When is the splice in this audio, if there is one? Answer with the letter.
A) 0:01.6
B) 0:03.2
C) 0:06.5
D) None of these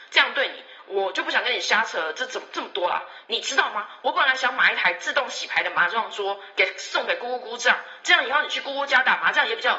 B